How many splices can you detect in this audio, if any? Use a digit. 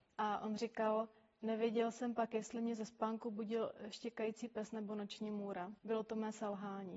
1